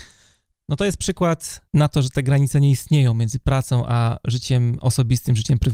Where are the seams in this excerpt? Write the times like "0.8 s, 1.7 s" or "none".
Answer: none